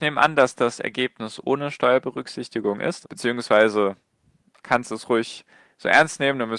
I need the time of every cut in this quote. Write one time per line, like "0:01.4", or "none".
0:03.0